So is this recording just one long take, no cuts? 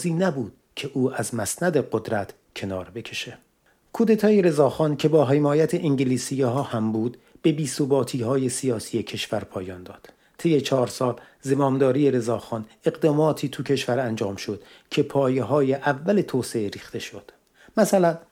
yes; 0 cuts

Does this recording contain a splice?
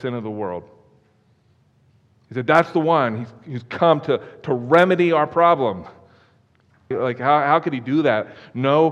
yes; 1 cut; at 6.9 s

